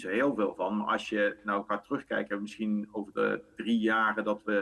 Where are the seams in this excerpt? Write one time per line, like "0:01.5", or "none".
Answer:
none

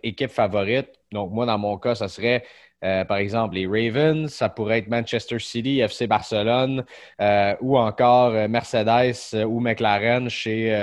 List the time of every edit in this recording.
none

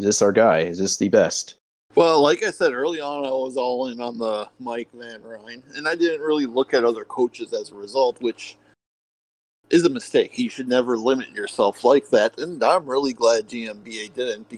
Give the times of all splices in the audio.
none

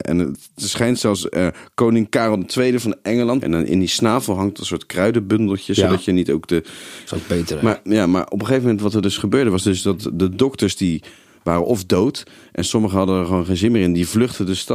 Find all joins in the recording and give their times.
0:03.4
0:07.1

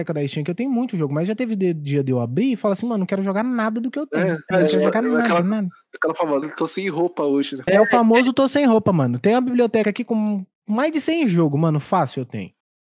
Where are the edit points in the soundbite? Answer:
0:04.5
0:06.4
0:07.7

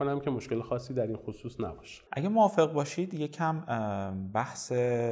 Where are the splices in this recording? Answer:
0:02.1

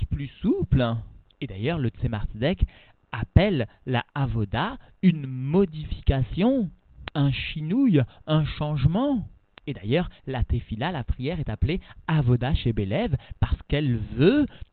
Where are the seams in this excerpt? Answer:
none

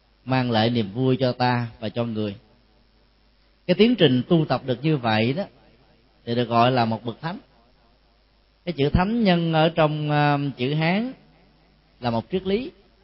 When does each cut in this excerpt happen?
none

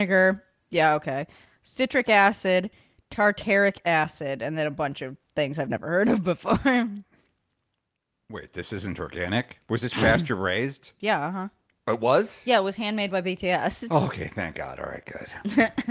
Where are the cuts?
none

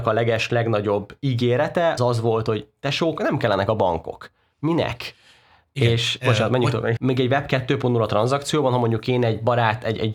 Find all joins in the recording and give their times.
0:02.0
0:07.0

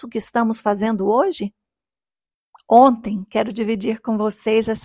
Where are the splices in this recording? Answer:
none

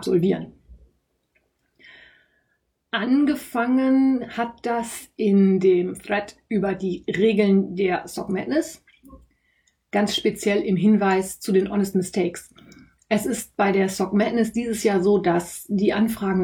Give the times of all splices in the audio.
none

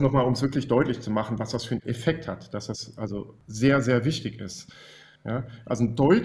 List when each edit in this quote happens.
0:05.2

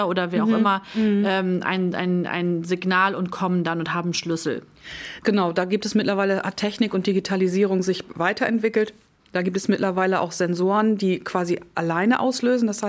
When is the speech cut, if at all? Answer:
none

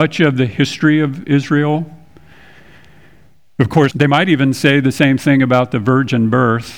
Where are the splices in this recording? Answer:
0:03.9

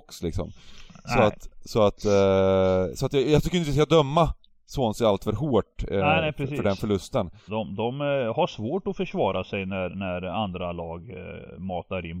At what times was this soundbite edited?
0:07.5

